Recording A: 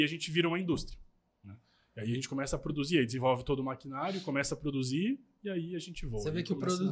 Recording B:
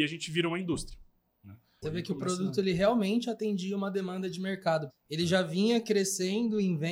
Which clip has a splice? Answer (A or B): B